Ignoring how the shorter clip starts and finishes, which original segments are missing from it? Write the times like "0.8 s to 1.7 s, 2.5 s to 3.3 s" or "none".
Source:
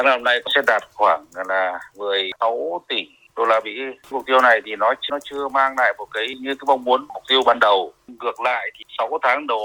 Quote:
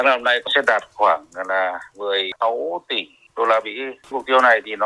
none